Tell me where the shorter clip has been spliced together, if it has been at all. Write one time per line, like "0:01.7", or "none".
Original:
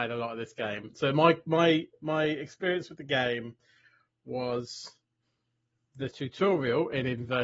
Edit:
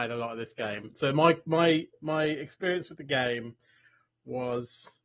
none